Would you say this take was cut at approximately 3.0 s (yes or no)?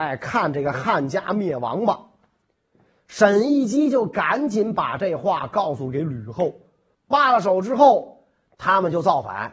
no